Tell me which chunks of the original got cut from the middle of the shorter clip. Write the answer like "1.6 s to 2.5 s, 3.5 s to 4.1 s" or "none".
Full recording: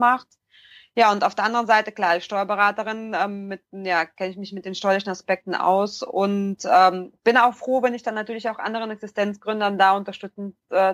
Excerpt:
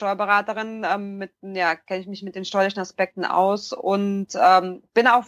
none